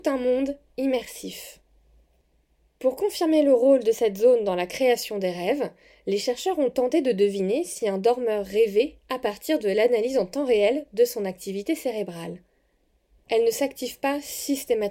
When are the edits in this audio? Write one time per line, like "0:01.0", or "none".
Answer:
0:13.2

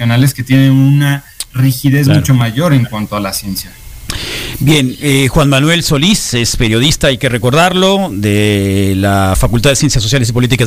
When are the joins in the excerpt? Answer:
none

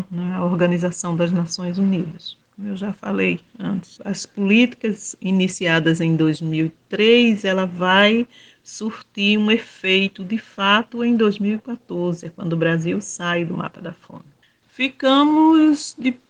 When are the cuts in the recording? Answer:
0:02.4
0:04.0
0:14.6

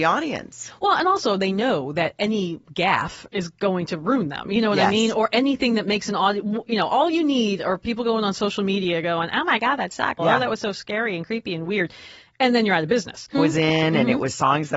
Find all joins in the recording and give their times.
0:10.2
0:13.3

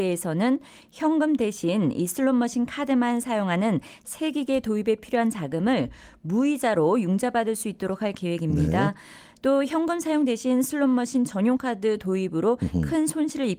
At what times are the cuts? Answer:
none

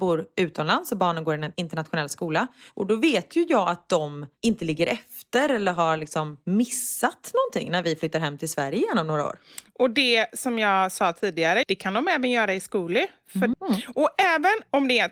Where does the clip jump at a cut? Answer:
0:11.6
0:13.5

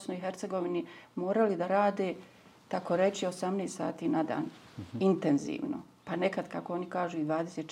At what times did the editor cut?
none

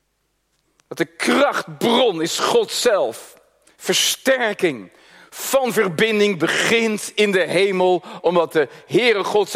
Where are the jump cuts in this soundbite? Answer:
none

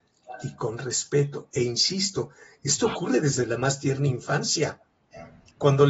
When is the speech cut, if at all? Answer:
none

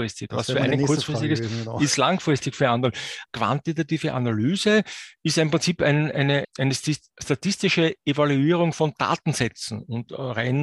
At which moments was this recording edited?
0:03.3
0:06.4

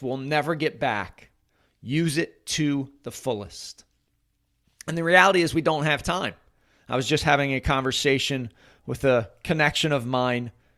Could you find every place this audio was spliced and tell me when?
none

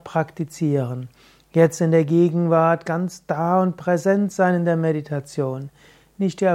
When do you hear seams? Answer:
none

